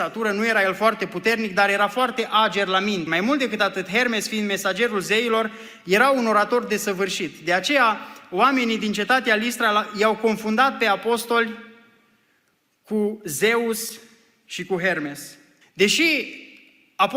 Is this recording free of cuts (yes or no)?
no